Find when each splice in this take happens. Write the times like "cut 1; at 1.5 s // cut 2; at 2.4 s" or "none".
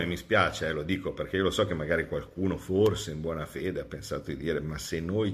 none